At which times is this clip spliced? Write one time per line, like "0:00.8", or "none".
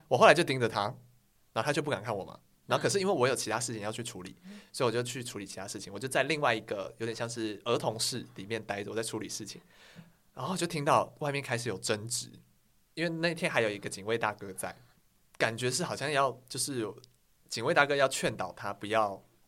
none